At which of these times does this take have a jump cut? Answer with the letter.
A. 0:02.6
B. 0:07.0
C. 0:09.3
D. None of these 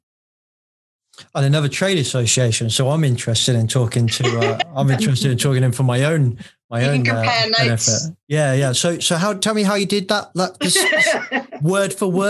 D